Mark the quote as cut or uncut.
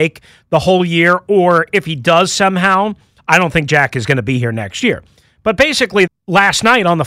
cut